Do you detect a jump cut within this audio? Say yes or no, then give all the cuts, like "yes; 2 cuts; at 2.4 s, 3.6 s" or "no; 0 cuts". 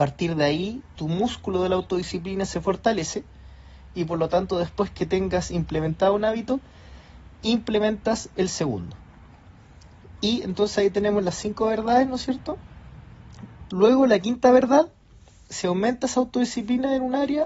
yes; 1 cut; at 13.7 s